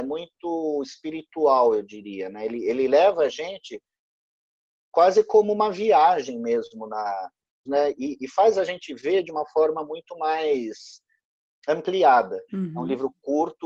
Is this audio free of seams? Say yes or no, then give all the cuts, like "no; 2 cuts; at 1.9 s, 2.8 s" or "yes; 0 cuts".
no; 2 cuts; at 7.7 s, 12.5 s